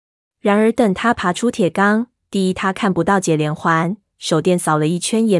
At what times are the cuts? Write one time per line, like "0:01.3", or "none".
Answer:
0:02.2
0:04.1